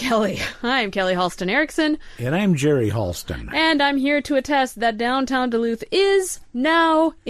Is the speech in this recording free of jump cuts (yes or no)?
yes